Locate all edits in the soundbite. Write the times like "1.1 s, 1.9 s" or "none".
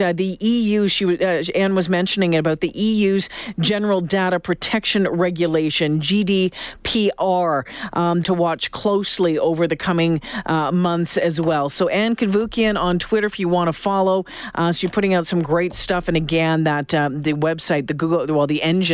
8.2 s